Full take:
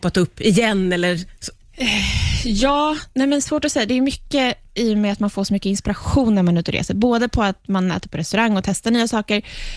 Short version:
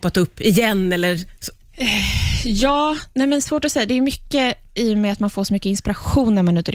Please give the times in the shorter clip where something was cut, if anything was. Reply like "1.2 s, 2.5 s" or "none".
none